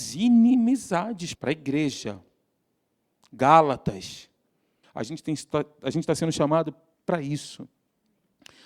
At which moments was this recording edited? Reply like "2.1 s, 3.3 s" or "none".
1.3 s, 4.8 s